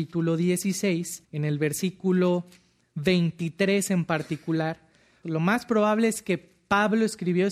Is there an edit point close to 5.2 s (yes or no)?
yes